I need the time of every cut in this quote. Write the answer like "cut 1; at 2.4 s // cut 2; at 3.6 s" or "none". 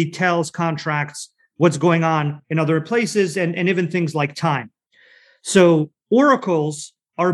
none